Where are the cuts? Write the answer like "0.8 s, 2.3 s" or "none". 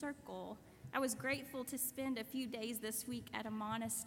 0.9 s